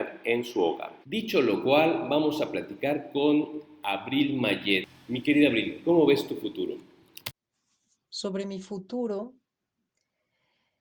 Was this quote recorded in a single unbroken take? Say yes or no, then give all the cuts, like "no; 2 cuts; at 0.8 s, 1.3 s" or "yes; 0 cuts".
no; 1 cut; at 1.0 s